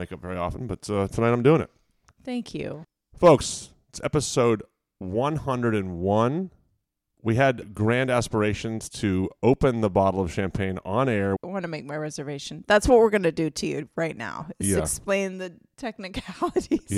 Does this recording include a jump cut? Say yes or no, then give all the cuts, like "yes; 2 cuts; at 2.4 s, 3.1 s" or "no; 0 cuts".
yes; 2 cuts; at 7.6 s, 11.4 s